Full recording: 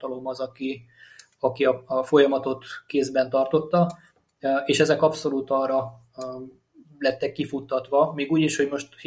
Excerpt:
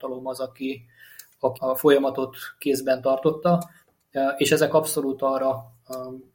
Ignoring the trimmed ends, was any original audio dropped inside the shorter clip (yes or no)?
yes